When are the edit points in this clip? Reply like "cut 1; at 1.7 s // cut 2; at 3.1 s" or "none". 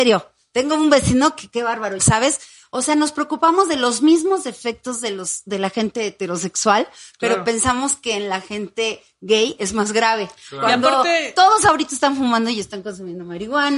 cut 1; at 2.0 s